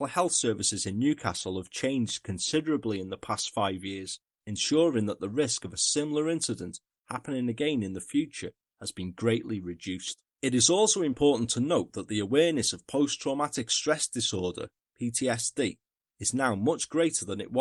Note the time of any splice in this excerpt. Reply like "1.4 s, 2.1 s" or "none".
10.3 s